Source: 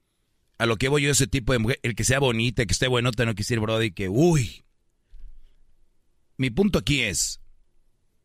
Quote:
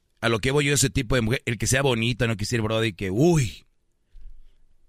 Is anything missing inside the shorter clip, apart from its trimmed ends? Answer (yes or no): yes